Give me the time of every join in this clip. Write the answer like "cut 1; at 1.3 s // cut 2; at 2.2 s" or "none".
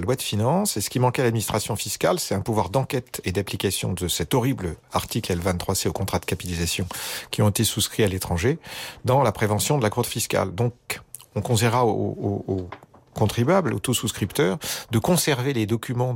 none